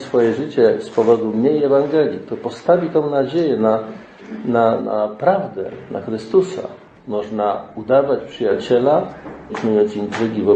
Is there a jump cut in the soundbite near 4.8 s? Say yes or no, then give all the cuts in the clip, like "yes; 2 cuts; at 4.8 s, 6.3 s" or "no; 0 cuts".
yes; 3 cuts; at 4.8 s, 6.9 s, 9.5 s